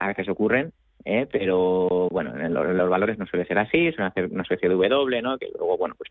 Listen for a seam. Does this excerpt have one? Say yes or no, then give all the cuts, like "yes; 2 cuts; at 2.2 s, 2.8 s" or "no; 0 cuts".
no; 0 cuts